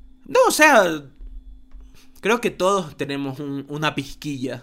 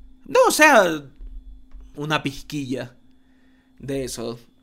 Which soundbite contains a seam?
second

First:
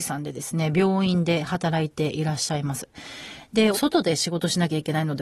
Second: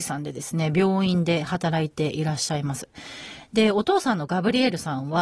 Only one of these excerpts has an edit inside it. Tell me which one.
first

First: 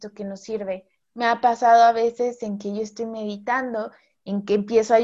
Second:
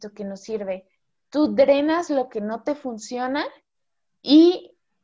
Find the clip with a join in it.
first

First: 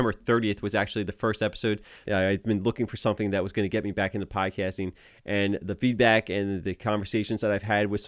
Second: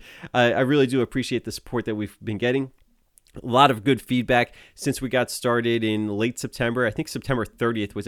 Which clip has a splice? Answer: first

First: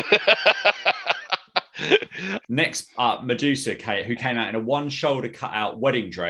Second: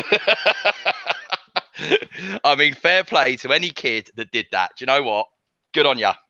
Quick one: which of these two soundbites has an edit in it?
first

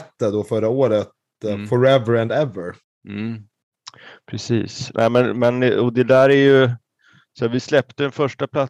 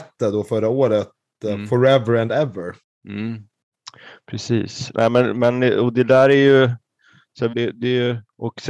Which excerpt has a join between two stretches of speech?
second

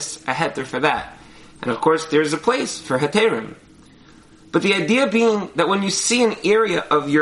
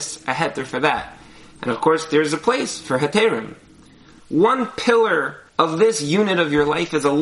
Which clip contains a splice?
second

